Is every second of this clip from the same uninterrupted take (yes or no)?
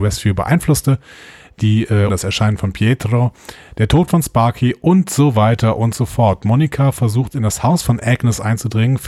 no